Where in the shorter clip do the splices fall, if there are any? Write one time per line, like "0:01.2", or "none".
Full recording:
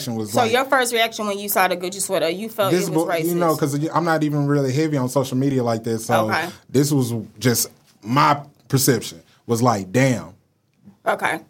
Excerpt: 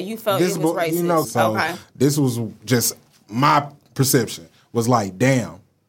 0:01.2